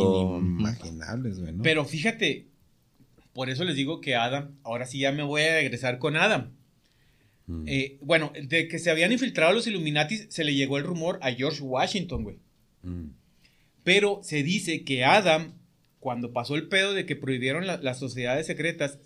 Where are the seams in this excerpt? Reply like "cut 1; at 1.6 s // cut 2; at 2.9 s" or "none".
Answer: none